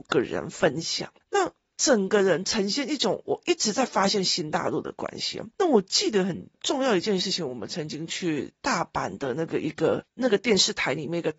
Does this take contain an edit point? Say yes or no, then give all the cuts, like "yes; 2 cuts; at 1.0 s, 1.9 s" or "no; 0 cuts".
yes; 1 cut; at 1.7 s